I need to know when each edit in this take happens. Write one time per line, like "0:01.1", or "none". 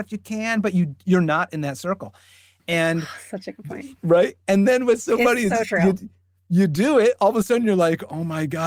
none